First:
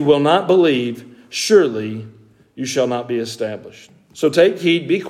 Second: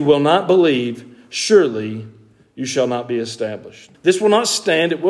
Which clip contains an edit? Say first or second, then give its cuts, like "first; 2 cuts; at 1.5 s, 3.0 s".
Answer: second; 1 cut; at 3.9 s